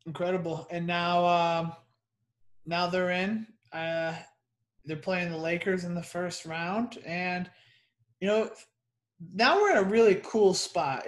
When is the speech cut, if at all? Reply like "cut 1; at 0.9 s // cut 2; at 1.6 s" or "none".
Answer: none